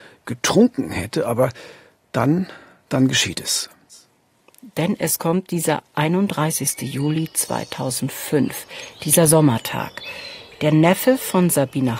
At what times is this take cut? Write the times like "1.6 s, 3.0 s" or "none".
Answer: none